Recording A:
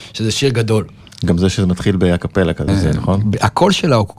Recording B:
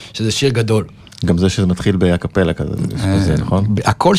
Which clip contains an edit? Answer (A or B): A